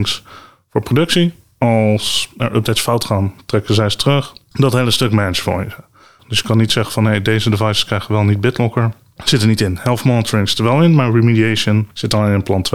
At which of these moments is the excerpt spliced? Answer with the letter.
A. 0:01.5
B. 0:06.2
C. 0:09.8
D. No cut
B